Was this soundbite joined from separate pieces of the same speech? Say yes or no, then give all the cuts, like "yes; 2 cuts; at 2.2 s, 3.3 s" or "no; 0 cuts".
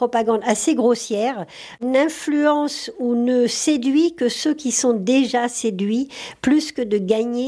no; 0 cuts